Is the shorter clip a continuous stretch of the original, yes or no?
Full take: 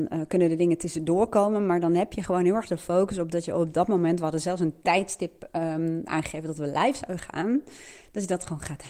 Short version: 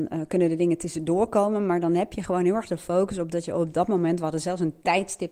yes